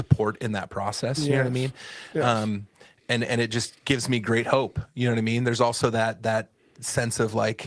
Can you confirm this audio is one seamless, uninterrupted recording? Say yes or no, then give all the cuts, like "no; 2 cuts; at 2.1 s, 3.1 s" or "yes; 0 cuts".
yes; 0 cuts